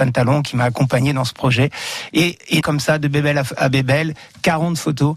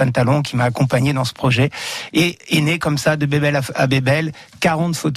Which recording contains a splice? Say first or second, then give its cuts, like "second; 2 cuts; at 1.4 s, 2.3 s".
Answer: first; 1 cut; at 2.6 s